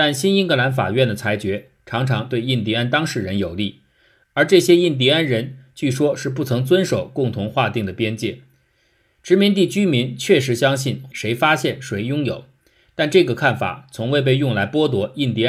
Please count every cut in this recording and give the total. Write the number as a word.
one